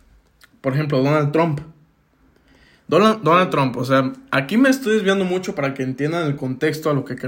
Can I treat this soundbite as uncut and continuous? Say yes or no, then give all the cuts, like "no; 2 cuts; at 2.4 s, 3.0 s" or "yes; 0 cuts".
yes; 0 cuts